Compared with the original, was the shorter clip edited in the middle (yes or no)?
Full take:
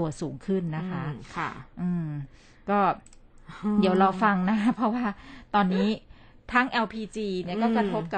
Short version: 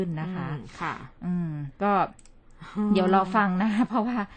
yes